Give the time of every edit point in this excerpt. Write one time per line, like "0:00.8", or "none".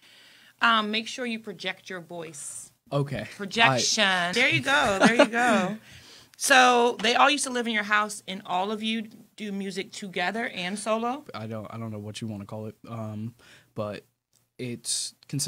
0:04.3
0:11.3